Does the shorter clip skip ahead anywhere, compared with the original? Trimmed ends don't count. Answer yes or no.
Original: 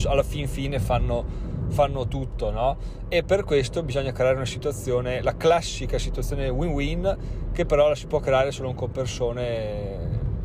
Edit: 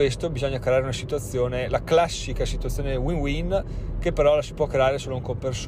no